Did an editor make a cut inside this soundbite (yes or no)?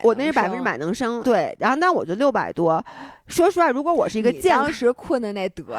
yes